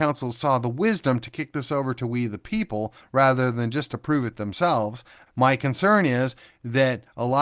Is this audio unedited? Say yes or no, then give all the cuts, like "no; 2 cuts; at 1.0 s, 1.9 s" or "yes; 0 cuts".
no; 1 cut; at 5.3 s